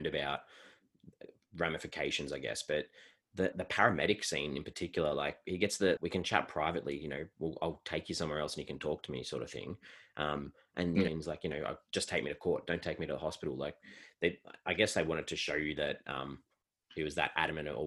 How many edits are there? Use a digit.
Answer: 3